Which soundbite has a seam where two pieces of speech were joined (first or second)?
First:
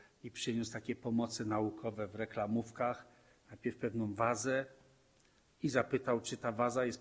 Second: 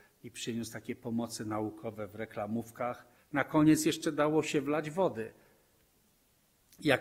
second